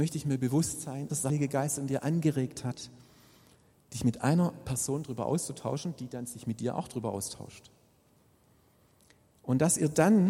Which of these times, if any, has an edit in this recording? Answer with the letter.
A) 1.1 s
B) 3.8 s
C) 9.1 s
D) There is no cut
A